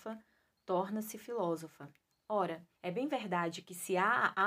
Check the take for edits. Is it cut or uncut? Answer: cut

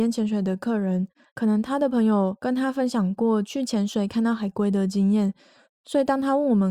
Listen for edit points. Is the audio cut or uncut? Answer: uncut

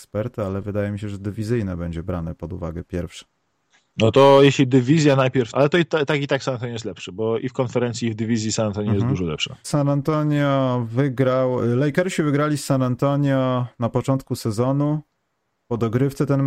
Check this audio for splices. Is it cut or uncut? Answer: cut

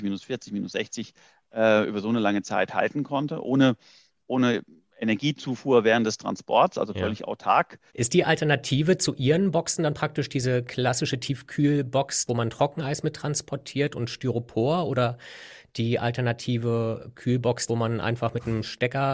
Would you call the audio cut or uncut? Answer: cut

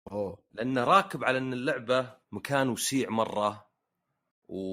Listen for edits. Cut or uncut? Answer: cut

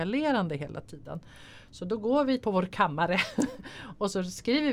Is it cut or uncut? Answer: cut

